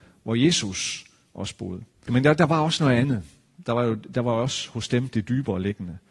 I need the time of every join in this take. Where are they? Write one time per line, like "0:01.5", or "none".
0:02.1